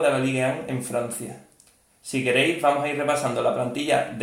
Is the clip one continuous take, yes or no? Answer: yes